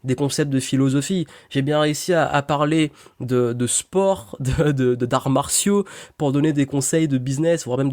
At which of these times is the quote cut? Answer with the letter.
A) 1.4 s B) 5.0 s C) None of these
C